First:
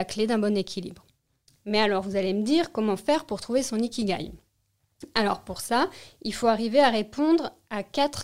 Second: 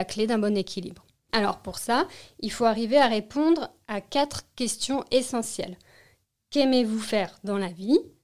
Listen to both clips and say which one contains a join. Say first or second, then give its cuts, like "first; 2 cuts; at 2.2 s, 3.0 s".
second; 1 cut; at 1.3 s